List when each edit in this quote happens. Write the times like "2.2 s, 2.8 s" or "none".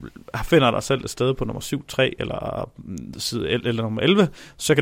none